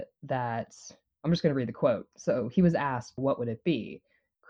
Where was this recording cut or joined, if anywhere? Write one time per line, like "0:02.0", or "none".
0:03.2